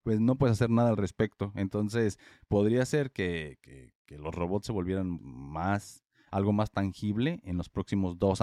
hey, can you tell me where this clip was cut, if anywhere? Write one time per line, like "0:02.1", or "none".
0:05.2